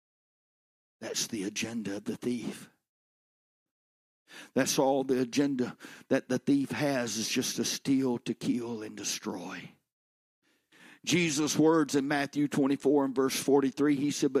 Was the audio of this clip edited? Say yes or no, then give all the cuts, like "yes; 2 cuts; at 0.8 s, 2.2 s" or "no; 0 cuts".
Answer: no; 0 cuts